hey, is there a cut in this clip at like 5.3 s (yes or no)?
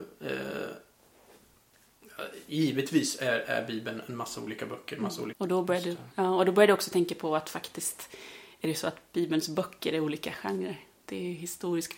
yes